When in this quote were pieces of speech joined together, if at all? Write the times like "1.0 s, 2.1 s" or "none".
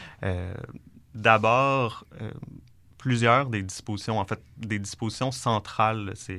none